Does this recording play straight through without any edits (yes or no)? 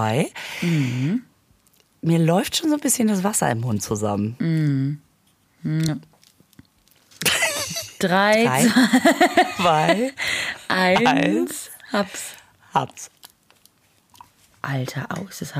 yes